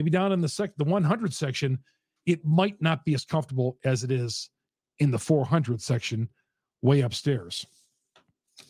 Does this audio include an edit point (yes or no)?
no